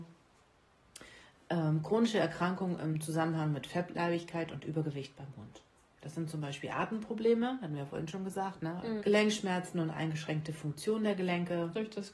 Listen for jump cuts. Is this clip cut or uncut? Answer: cut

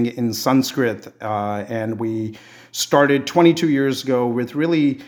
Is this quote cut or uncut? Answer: uncut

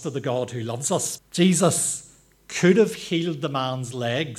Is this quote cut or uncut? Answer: cut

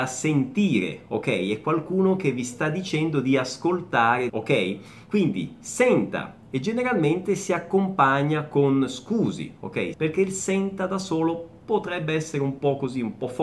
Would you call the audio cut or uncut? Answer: cut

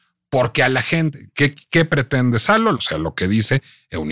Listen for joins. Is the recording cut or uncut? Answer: cut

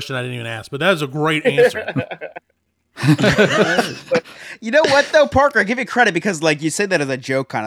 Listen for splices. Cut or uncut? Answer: uncut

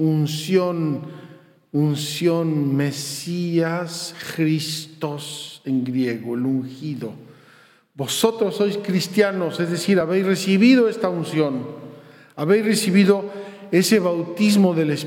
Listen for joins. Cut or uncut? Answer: uncut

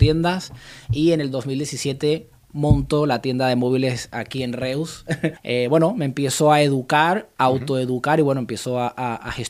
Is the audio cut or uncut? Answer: cut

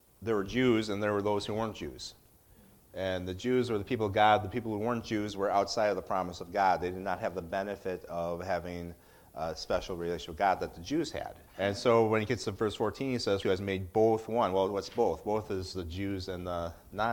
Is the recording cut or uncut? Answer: cut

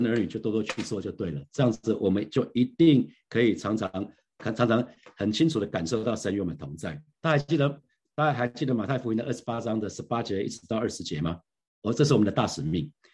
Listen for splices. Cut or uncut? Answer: cut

